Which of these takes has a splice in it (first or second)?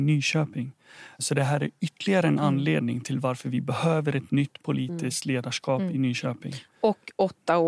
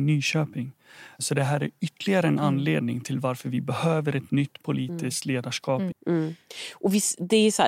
second